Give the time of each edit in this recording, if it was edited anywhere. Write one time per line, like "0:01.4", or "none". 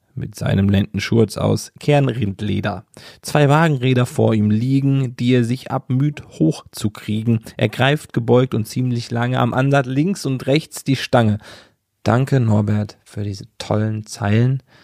0:11.9